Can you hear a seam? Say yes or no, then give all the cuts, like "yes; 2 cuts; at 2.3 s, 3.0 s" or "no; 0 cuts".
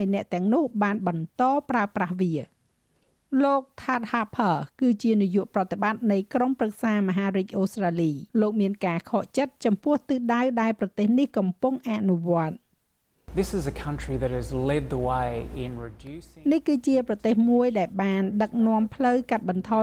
yes; 1 cut; at 8.3 s